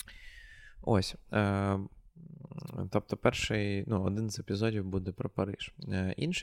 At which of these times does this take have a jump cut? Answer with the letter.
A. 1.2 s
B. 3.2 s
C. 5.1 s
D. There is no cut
D